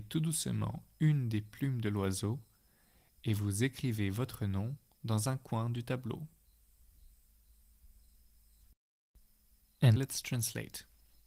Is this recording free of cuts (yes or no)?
no